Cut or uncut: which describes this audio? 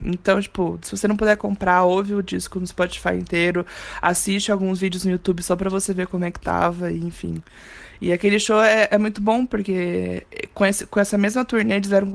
uncut